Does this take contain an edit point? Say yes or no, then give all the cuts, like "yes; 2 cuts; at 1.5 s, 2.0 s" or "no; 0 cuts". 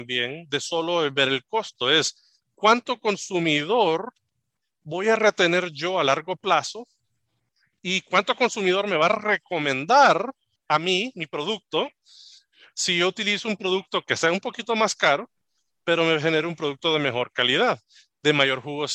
no; 0 cuts